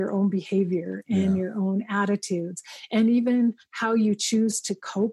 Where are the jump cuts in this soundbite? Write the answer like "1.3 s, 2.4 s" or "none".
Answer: none